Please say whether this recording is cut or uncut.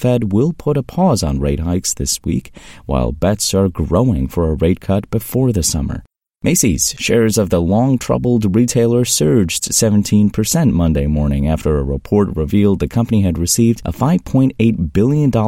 cut